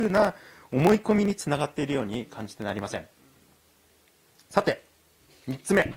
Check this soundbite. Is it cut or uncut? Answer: uncut